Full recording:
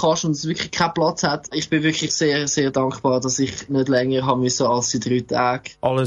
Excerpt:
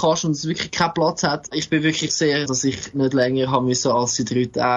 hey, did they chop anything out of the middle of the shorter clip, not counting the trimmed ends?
yes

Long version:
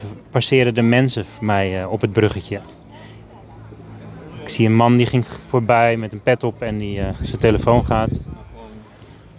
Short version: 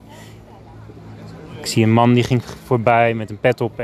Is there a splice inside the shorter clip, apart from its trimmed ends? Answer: no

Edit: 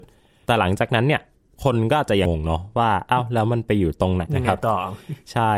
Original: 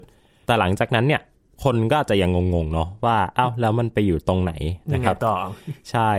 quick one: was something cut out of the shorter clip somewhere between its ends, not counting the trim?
yes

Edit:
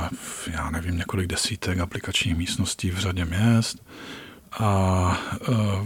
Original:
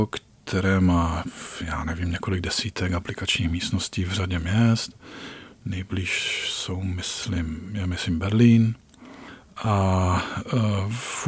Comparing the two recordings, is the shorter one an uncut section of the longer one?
no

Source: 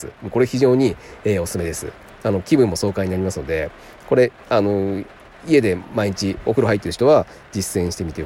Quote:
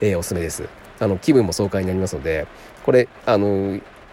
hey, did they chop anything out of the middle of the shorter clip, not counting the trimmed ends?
no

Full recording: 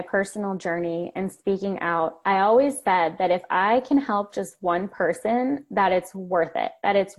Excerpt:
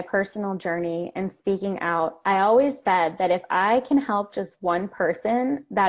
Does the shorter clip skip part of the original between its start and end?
no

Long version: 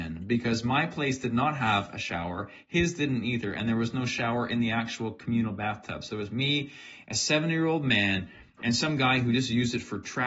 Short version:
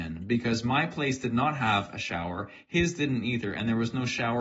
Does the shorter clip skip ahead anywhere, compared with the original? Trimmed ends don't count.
no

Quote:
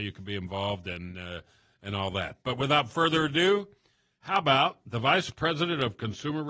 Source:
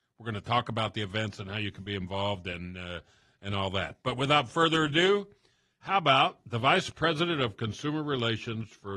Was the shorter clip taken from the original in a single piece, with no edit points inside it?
yes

